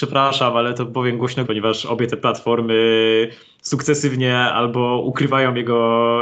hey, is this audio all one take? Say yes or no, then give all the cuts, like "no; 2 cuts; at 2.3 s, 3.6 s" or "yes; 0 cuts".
no; 1 cut; at 1.4 s